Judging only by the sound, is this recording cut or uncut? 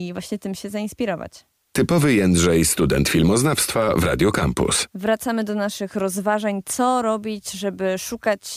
uncut